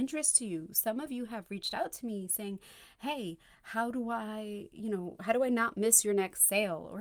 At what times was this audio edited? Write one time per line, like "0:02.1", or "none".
none